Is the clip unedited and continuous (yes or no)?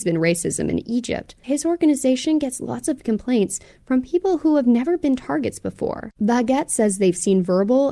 no